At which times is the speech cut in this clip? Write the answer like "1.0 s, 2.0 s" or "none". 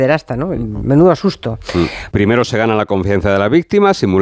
2.1 s